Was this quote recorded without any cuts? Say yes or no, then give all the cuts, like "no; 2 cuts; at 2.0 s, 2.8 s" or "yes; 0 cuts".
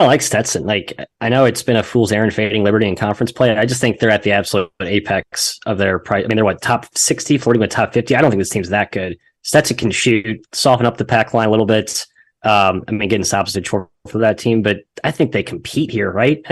no; 1 cut; at 13.5 s